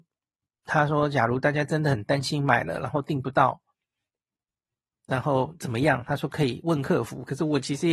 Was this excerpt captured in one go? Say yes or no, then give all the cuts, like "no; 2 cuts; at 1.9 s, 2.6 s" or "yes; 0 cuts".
yes; 0 cuts